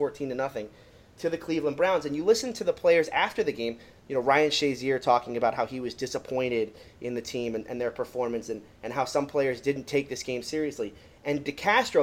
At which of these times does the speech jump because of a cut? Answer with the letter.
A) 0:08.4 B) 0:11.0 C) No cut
C